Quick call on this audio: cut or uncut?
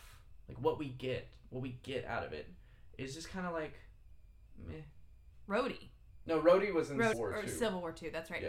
cut